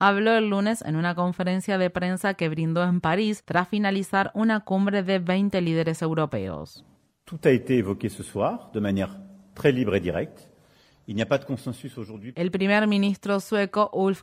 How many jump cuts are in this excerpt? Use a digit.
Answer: 1